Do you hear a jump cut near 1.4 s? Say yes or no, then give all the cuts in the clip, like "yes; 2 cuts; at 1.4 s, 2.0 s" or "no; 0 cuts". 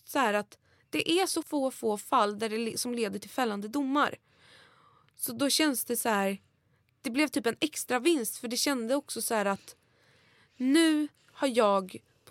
yes; 1 cut; at 1.4 s